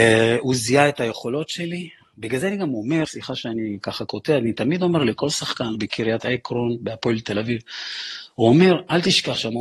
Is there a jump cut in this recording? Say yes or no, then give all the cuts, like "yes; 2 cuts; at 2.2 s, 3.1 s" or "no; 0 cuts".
yes; 2 cuts; at 3.0 s, 5.7 s